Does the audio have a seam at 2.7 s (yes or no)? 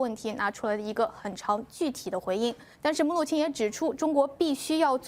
yes